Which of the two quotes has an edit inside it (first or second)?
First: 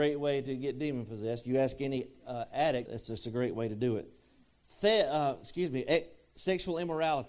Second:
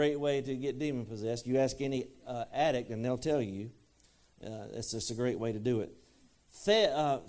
first